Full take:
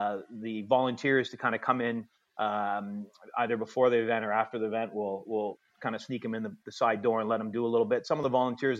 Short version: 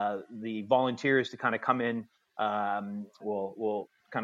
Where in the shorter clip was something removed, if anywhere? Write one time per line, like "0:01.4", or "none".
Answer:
0:03.2